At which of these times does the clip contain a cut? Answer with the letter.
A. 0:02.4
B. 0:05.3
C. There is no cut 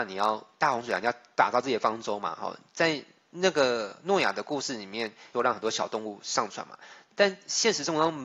B